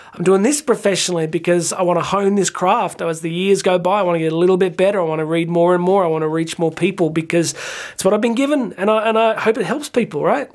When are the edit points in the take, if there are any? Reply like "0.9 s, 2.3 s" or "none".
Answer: none